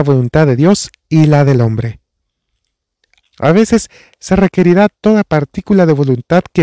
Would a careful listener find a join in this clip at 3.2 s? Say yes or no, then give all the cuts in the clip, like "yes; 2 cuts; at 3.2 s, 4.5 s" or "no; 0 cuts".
yes; 1 cut; at 3.2 s